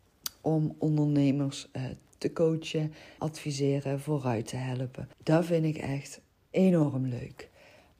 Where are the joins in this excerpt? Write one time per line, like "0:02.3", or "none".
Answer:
0:03.2
0:05.1

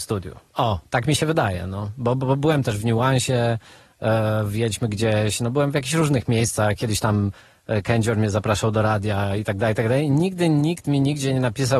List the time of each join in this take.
none

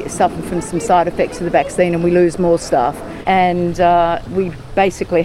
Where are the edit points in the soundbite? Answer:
0:03.2
0:04.3

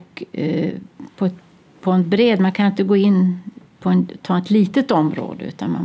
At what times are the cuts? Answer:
none

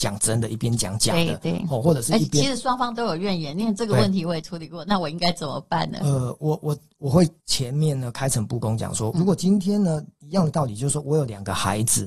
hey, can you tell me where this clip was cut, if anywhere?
0:07.4
0:09.1

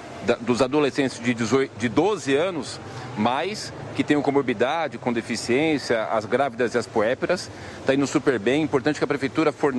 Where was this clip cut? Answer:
none

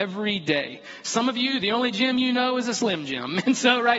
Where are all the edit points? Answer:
none

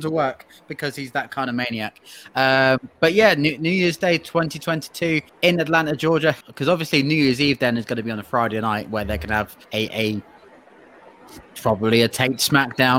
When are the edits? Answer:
0:05.3
0:06.4
0:09.7

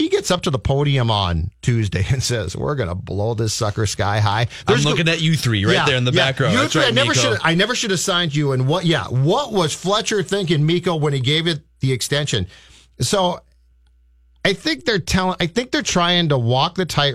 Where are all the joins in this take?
none

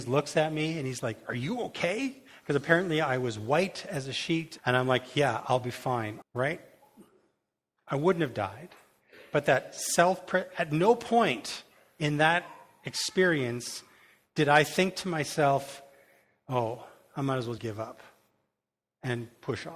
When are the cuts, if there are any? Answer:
0:04.6
0:06.2
0:17.6

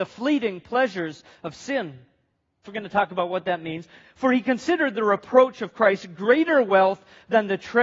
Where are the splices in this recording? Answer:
0:02.6

